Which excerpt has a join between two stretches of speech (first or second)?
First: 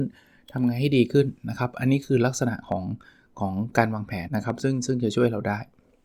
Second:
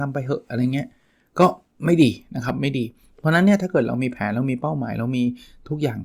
first